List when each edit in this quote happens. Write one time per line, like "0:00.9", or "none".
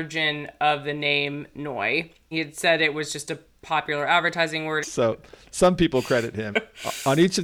0:02.3
0:04.8
0:06.5